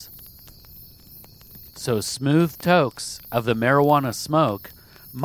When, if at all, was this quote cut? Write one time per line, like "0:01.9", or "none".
0:01.7